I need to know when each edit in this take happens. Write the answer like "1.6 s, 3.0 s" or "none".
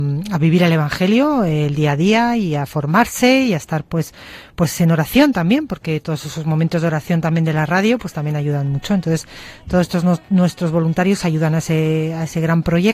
none